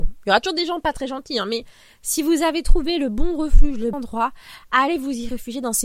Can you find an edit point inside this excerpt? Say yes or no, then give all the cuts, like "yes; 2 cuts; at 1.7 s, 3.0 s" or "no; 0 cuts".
yes; 1 cut; at 3.9 s